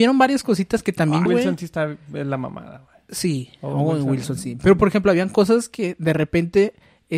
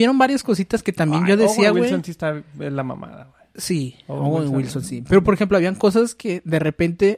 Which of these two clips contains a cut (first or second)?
first